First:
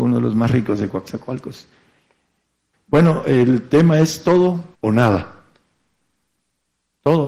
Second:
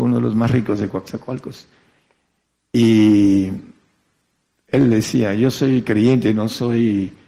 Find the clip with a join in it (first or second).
first